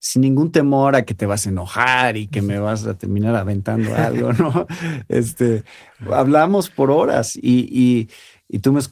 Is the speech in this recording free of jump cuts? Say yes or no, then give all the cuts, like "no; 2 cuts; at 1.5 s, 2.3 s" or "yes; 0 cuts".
yes; 0 cuts